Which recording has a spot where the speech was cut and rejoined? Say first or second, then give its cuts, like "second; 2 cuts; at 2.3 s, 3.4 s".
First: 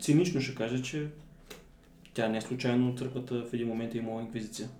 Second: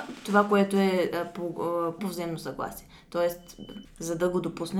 second; 2 cuts; at 2.0 s, 3.8 s